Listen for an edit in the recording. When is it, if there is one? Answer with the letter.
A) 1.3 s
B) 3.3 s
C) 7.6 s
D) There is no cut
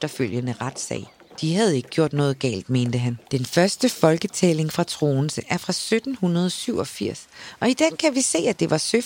B